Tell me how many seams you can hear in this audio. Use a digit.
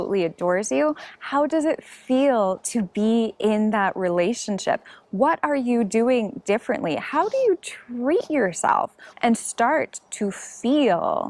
1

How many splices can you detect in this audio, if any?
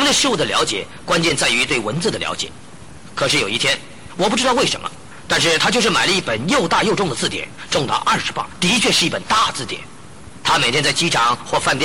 2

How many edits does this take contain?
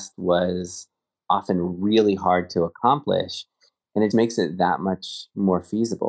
1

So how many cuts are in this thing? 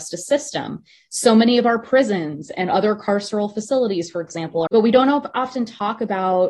1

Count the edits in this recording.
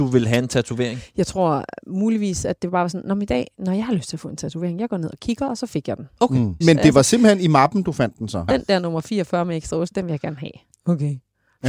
3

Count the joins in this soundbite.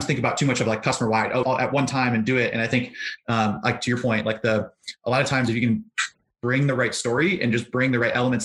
1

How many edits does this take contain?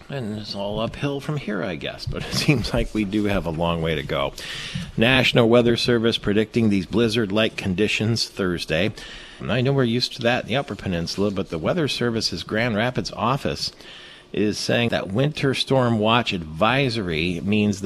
2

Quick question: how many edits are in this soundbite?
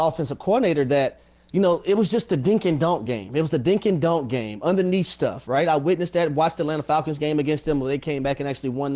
0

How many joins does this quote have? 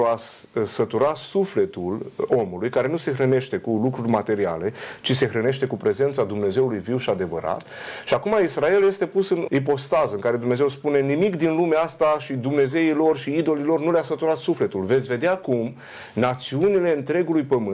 1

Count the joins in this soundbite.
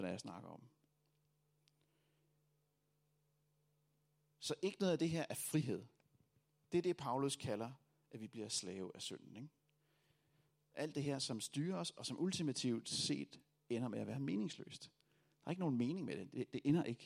0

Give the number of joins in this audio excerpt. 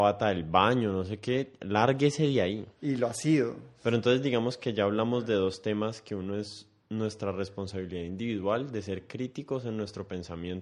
1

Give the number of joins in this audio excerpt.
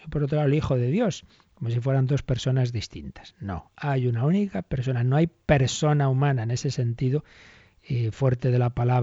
0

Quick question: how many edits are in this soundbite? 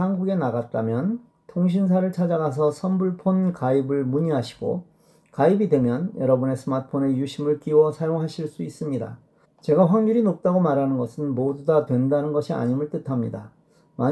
1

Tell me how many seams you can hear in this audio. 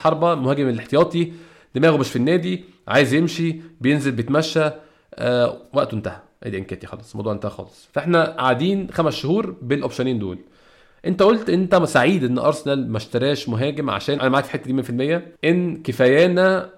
2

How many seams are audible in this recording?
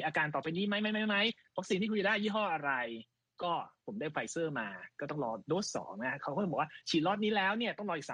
0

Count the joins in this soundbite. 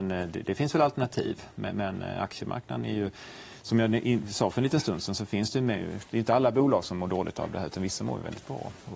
0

